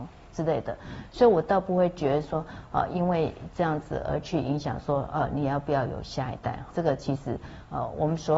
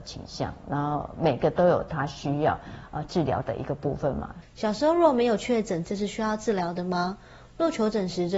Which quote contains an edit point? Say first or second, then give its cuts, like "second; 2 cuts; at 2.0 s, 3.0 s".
second; 2 cuts; at 4.4 s, 5.8 s